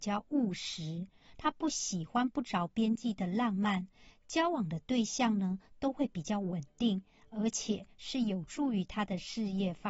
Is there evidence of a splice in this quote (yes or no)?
no